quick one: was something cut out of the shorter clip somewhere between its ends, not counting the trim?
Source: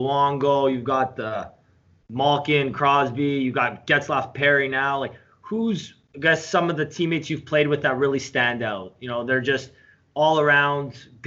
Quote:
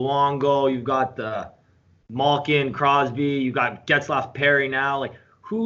no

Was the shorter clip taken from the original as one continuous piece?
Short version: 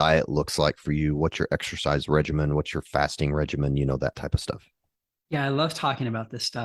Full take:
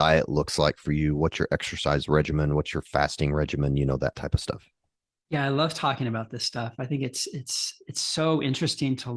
yes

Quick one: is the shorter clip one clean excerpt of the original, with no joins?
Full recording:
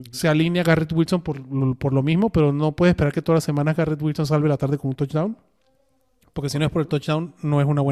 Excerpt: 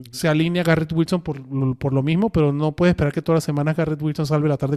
yes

